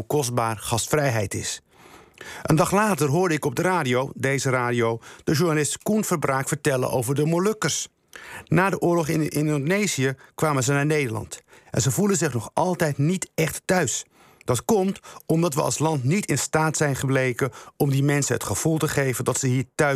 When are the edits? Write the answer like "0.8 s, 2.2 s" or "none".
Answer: none